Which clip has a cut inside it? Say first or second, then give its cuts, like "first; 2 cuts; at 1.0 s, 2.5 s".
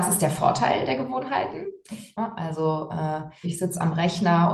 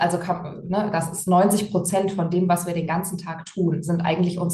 first; 2 cuts; at 2.1 s, 3.4 s